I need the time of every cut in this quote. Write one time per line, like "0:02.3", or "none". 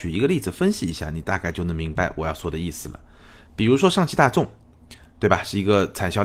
none